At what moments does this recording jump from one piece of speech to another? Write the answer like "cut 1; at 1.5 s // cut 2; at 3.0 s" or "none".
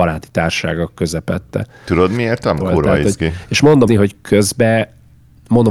cut 1; at 2.6 s // cut 2; at 3.9 s